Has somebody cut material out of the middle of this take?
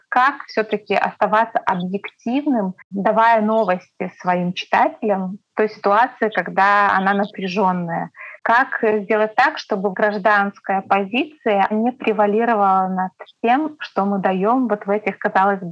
no; 0 cuts

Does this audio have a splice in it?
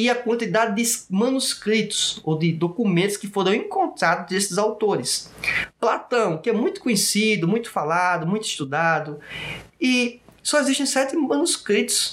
no; 0 cuts

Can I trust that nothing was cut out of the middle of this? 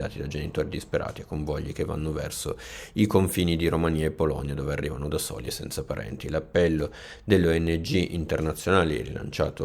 yes; 0 cuts

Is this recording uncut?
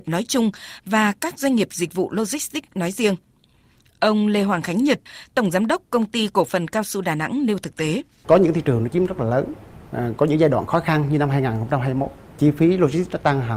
no; 1 cut; at 8.2 s

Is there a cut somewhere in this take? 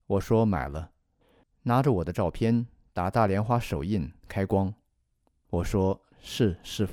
yes; 1 cut; at 1.4 s

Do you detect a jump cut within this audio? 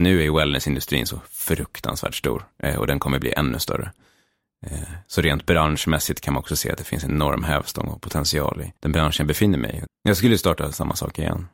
yes; 2 cuts; at 8.8 s, 9.8 s

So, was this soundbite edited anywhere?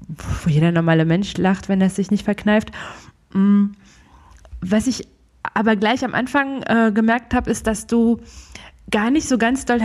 no; 0 cuts

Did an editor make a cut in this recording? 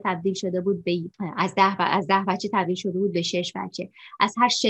yes; 1 cut; at 1.1 s

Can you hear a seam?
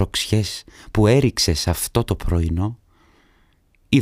no; 0 cuts

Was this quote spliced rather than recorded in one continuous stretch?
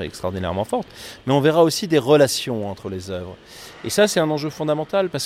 no; 0 cuts

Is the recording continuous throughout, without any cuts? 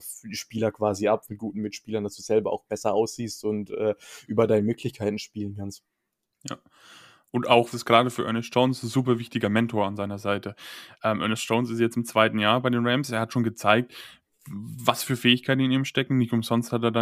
no; 2 cuts; at 1.3 s, 7.7 s

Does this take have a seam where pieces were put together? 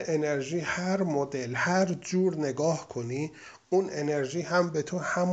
no; 0 cuts

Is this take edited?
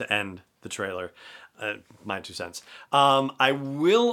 no; 0 cuts

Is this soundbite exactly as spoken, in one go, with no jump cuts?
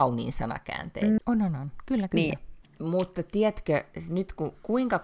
no; 2 cuts; at 1.2 s, 2.6 s

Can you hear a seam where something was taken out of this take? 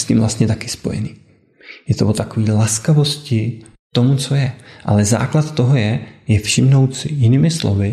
no; 0 cuts

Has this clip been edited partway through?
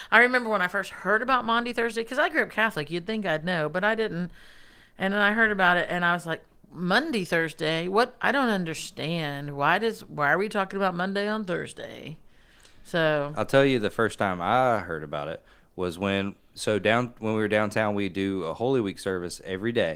no; 0 cuts

